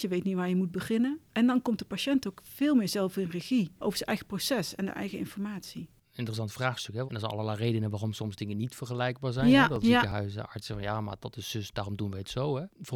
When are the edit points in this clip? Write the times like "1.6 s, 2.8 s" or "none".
7.1 s, 9.8 s